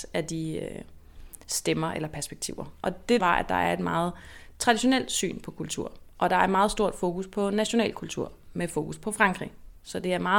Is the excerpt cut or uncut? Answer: cut